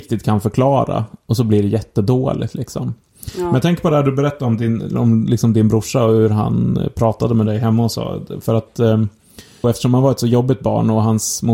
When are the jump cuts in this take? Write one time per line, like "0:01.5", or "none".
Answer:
0:09.6